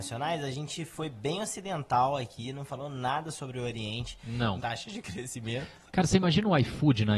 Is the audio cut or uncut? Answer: cut